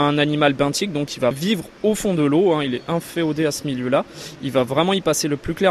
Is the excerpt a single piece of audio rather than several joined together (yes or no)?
no